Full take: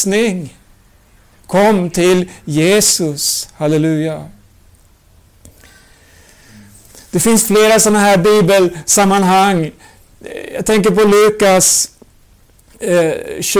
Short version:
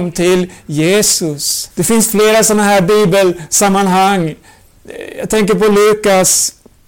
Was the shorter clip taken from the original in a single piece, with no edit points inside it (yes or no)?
no